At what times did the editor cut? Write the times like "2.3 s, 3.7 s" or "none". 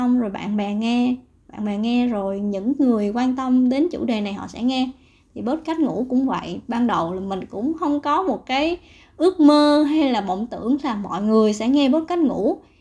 none